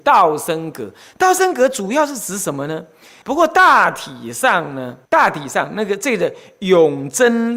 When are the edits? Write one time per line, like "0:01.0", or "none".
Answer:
0:03.2
0:05.0